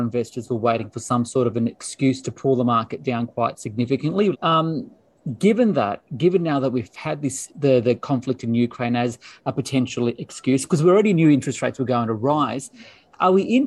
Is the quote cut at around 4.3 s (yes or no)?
yes